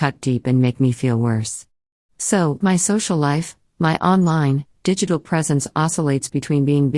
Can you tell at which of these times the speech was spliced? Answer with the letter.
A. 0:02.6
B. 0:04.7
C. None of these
A